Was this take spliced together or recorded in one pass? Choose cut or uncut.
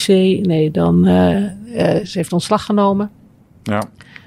uncut